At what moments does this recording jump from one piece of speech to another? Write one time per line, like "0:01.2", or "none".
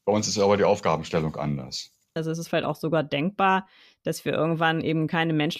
0:02.2